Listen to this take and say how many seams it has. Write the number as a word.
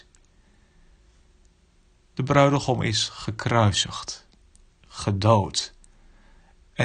zero